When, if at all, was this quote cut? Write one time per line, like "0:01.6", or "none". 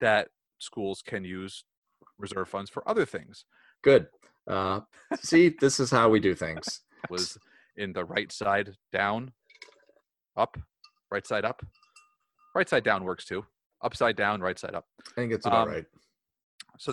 0:03.7
0:07.1